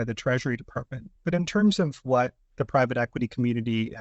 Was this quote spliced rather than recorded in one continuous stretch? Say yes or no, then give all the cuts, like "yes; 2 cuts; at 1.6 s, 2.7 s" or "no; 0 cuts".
no; 0 cuts